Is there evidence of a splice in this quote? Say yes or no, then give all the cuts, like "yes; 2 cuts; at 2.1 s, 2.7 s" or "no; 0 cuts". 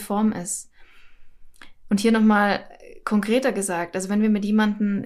no; 0 cuts